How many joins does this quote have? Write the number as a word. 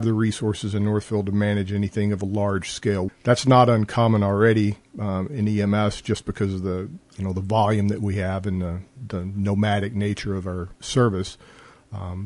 two